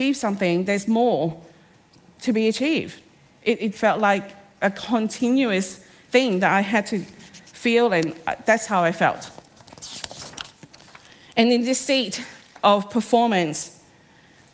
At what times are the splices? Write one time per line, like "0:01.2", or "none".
0:03.7